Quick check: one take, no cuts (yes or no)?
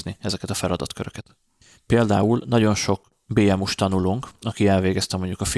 no